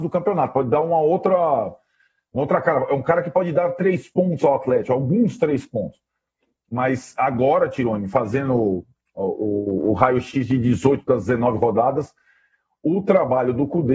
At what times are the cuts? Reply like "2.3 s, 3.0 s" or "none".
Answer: none